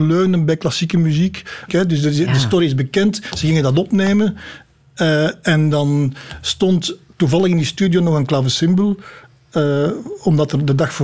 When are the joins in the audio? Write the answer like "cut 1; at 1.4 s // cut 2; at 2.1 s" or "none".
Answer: cut 1; at 1.7 s